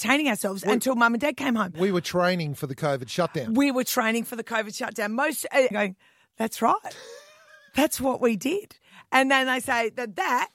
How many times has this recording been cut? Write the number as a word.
one